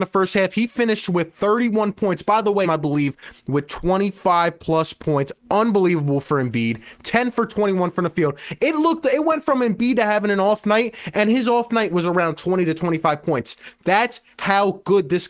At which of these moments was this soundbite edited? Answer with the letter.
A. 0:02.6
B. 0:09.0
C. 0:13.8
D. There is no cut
A